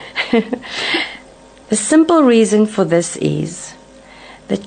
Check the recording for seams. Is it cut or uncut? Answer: cut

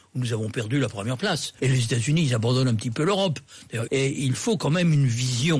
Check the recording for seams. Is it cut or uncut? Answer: cut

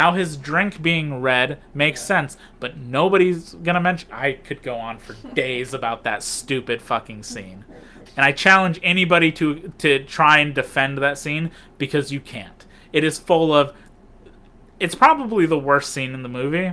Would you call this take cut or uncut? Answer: cut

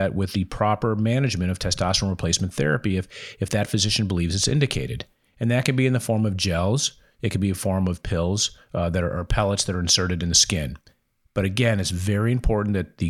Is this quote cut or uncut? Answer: uncut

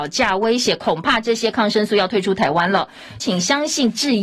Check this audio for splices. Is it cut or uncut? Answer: cut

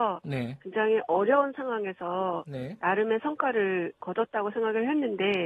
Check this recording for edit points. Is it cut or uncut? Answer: uncut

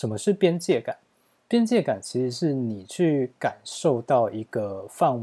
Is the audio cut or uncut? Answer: uncut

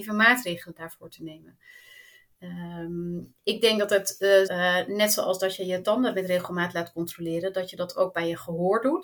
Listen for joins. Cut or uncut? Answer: cut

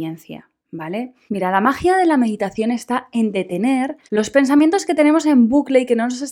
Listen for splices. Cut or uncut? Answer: cut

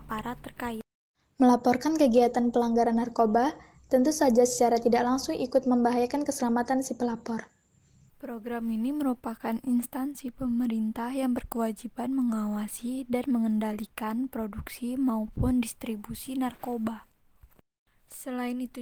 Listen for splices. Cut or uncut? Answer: cut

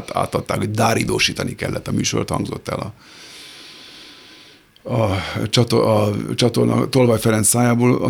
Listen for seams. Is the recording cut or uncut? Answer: uncut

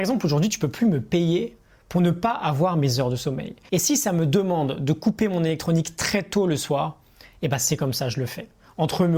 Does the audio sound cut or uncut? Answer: cut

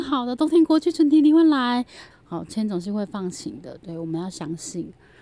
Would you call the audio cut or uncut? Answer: cut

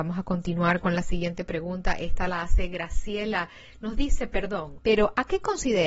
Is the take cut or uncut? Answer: cut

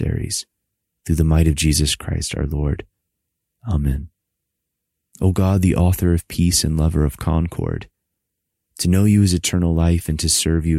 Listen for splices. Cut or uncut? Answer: cut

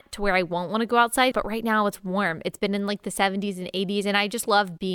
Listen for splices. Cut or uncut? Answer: cut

